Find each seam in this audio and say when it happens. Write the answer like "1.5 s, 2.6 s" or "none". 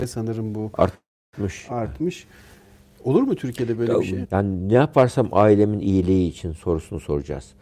4.2 s